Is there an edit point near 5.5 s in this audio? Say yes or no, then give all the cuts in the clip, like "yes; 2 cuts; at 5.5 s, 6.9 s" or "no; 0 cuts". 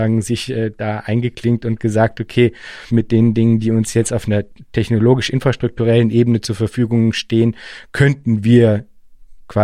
no; 1 cut; at 2.9 s